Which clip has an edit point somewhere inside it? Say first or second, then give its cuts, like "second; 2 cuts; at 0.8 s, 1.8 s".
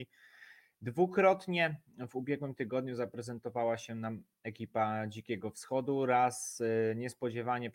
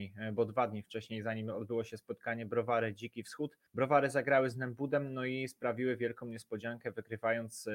second; 1 cut; at 3.7 s